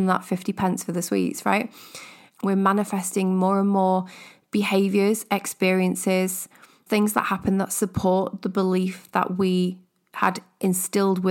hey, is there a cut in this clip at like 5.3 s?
no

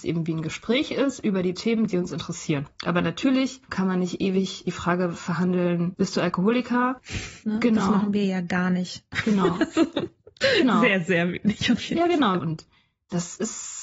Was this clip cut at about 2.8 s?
yes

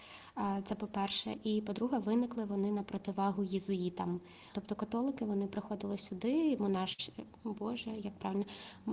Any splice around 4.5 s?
yes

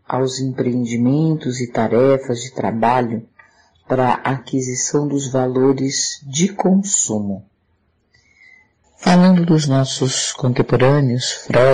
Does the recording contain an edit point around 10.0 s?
no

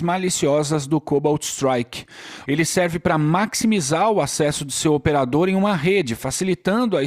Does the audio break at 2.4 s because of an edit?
yes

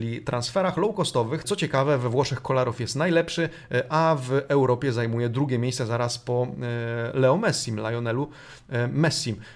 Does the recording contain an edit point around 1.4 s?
yes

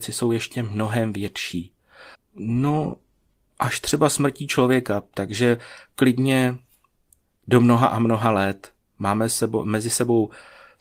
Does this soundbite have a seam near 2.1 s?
yes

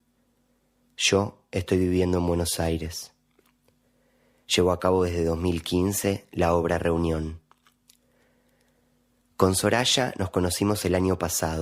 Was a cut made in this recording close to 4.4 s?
yes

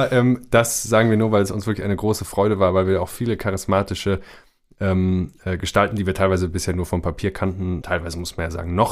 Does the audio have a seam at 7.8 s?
yes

